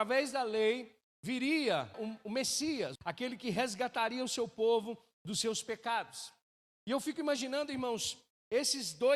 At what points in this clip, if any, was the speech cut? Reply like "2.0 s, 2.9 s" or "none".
1.9 s, 3.0 s